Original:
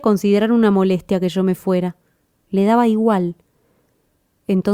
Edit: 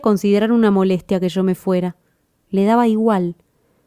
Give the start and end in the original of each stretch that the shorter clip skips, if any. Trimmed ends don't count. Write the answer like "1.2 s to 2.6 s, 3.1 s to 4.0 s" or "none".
none